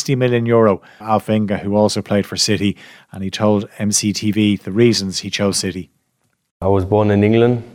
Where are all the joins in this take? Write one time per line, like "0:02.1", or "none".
0:01.0